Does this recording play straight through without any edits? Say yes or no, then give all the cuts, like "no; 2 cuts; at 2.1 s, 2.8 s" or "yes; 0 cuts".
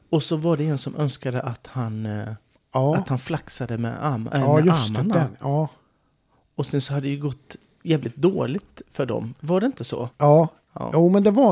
no; 2 cuts; at 4.3 s, 10.1 s